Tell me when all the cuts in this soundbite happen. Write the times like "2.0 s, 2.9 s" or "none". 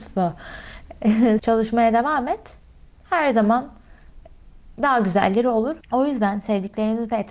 1.4 s, 5.8 s